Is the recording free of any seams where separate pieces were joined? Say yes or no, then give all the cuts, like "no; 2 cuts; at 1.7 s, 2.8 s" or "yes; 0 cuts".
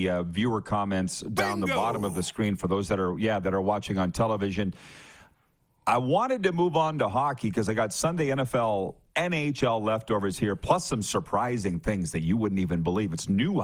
yes; 0 cuts